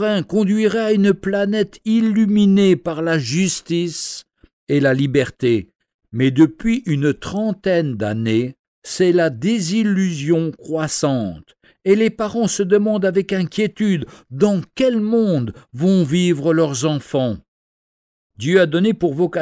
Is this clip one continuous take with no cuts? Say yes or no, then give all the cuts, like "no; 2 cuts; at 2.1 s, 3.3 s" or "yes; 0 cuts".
yes; 0 cuts